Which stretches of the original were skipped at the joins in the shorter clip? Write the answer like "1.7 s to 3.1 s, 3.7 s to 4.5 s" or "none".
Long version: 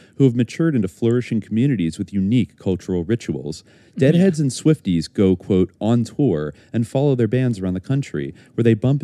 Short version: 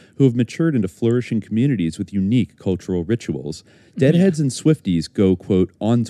none